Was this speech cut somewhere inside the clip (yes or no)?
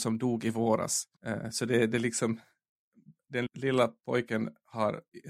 yes